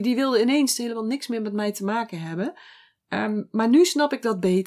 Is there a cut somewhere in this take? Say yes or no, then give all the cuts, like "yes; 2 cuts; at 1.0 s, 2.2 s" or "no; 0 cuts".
no; 0 cuts